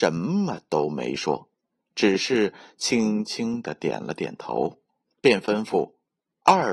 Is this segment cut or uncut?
uncut